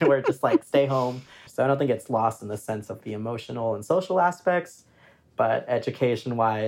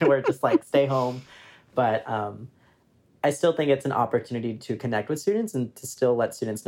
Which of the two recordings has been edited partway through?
first; 1 cut; at 1.5 s

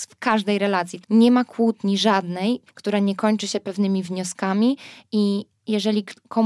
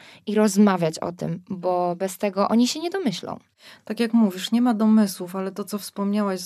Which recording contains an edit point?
first; 2 cuts; at 1.0 s, 2.7 s

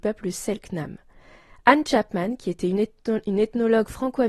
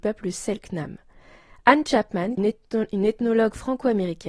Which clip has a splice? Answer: second; 1 cut; at 2.4 s

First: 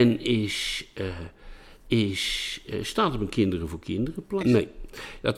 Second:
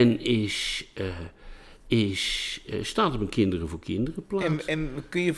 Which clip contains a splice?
first; 1 cut; at 4.4 s

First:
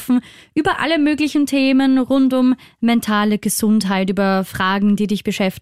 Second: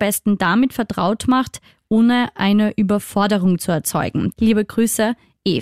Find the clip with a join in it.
second; 1 cut; at 4.3 s

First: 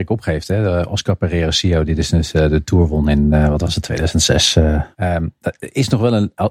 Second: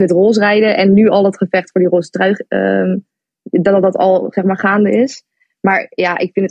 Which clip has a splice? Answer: first; 1 cut; at 4.9 s

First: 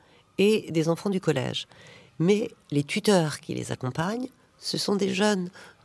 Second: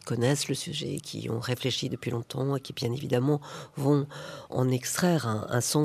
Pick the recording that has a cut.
second; 1 cut; at 4.5 s

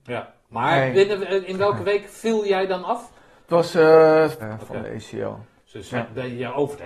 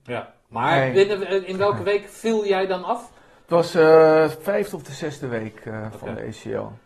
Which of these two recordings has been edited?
first; 1 cut; at 4.4 s

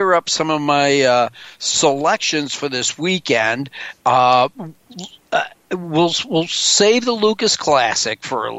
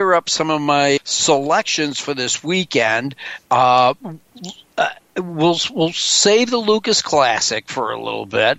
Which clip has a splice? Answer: second; 1 cut; at 1.0 s

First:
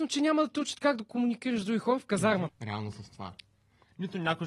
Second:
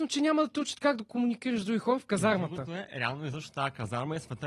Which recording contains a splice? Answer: first; 1 cut; at 2.5 s

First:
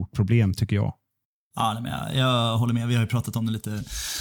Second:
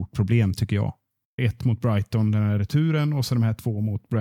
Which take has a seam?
second; 1 cut; at 1.4 s

